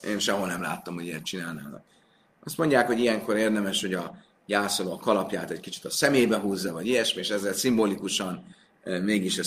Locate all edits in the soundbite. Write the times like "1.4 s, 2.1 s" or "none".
none